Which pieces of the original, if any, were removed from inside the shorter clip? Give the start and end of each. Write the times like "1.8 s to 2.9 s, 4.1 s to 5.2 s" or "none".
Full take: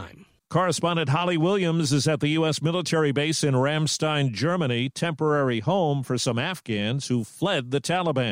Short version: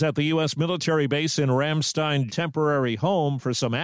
4.3 s to 4.9 s